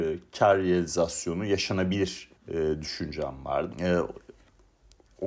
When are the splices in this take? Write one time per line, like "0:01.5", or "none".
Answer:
0:02.4
0:03.7